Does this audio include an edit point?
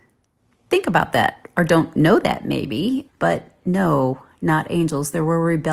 yes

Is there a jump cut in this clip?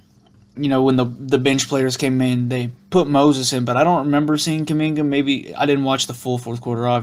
no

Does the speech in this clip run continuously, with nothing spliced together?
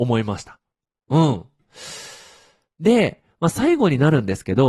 yes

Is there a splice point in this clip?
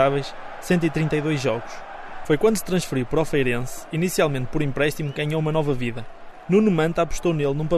yes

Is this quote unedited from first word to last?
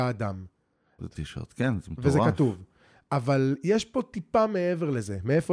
no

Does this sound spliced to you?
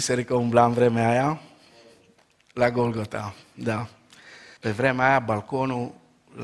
yes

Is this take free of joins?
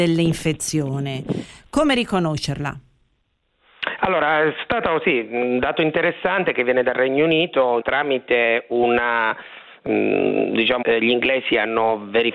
no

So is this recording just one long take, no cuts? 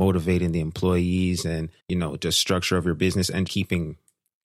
no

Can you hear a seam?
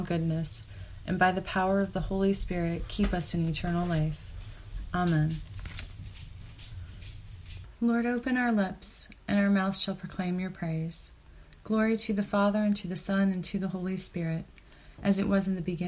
yes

